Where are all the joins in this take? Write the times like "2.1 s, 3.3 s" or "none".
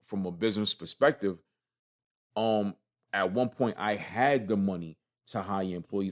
none